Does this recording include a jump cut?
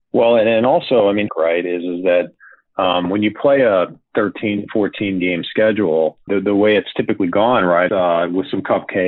yes; 3 cuts; at 1.3 s, 6.3 s, 7.9 s

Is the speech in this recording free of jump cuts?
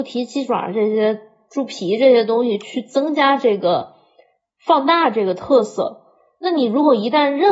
yes; 0 cuts

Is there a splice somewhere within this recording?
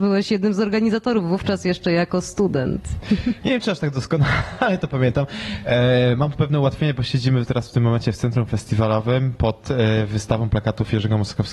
yes; 1 cut; at 3.4 s

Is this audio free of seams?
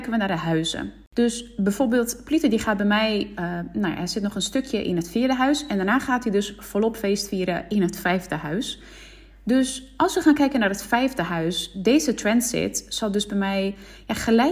yes; 0 cuts

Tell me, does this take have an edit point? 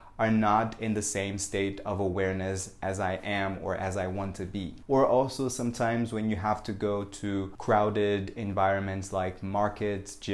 yes; 1 cut; at 4.9 s

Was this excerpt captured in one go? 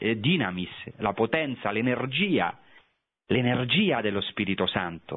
yes; 0 cuts

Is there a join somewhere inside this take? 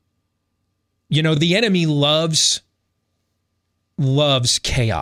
no; 0 cuts

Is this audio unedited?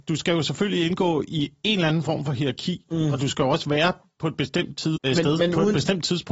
no; 1 cut; at 5.0 s

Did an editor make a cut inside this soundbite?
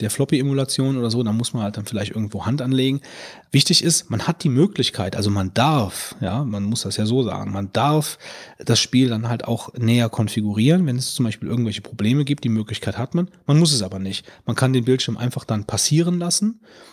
no; 0 cuts

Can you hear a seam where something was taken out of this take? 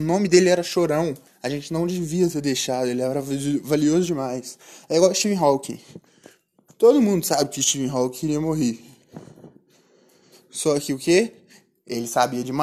yes; 1 cut; at 1.3 s

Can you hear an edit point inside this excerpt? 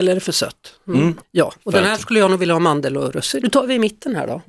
yes; 2 cuts; at 1.2 s, 3.4 s

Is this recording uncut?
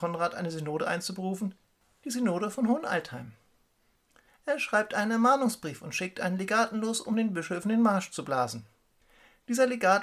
no; 1 cut; at 4.3 s

